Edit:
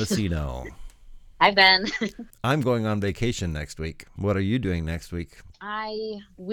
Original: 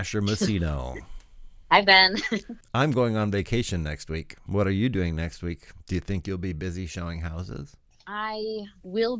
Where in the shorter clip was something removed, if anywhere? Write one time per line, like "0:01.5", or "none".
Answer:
0:05.5